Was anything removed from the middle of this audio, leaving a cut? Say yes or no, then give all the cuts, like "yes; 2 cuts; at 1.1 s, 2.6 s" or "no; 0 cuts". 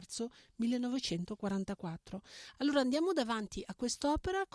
no; 0 cuts